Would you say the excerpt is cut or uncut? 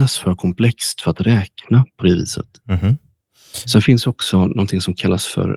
cut